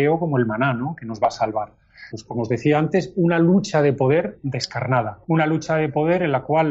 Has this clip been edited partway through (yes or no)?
yes